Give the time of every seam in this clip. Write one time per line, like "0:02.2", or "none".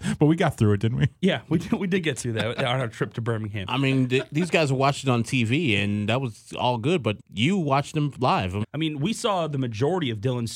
0:07.2
0:08.6